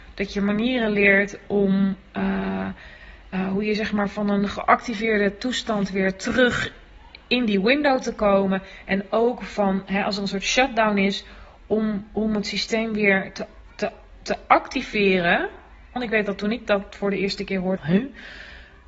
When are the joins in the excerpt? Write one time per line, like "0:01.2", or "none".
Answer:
0:16.0
0:17.8